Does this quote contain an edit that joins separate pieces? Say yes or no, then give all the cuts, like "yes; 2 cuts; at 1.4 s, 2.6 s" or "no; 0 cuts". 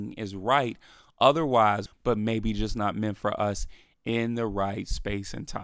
yes; 1 cut; at 1.9 s